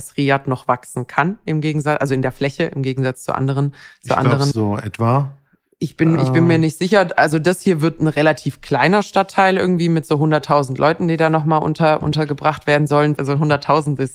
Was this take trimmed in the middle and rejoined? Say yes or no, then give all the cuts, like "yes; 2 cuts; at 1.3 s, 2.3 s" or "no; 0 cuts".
yes; 2 cuts; at 4.5 s, 13.2 s